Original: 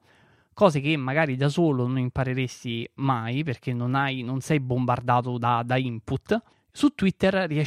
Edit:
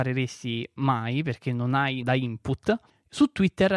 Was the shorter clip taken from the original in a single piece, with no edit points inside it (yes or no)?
no